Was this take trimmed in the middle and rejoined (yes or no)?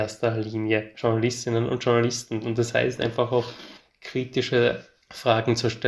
no